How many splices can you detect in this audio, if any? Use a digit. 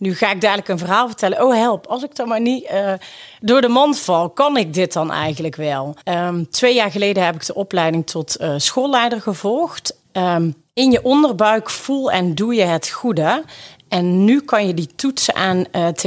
2